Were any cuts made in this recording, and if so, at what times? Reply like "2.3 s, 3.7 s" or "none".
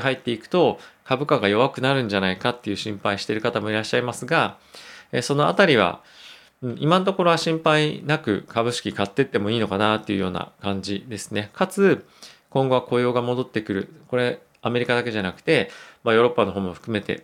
11.5 s

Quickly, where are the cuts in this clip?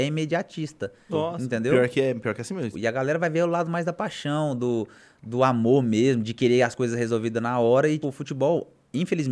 1.1 s, 2.7 s, 8.0 s

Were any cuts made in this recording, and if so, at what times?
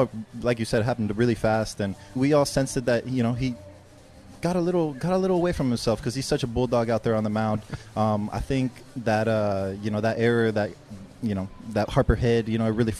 2.2 s

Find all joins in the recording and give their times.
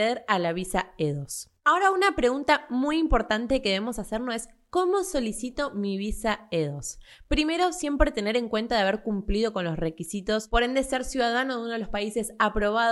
none

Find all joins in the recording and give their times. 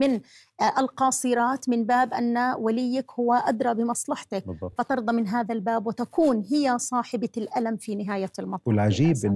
none

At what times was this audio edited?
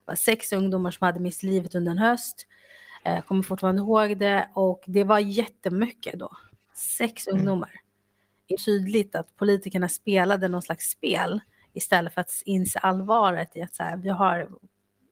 8.6 s

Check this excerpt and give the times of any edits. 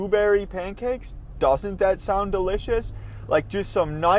none

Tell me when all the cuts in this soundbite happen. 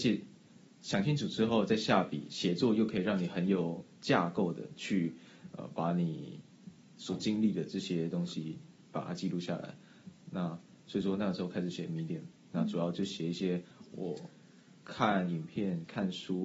none

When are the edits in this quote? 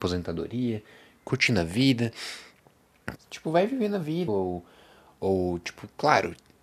3.2 s, 4.3 s

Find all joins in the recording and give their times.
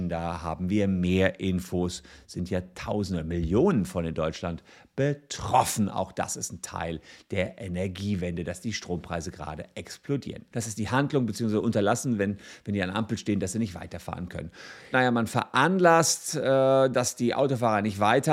10.5 s, 14.9 s

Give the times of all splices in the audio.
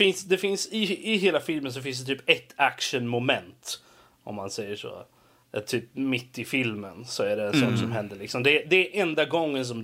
none

